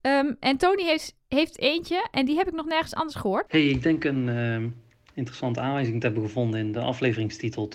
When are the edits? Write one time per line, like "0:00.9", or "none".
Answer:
0:03.5

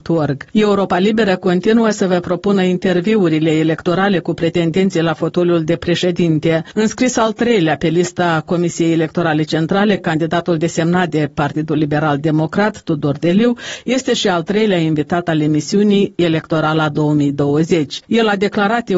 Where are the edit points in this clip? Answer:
none

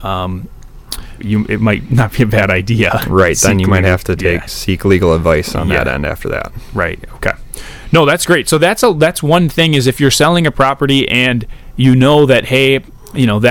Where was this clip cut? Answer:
0:01.2
0:06.7

